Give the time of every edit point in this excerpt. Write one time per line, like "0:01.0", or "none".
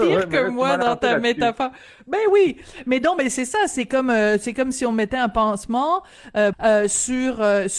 0:06.5